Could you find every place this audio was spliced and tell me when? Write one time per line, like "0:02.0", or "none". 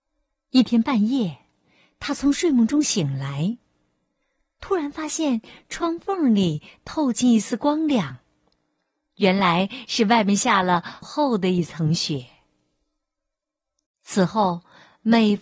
0:11.0
0:13.9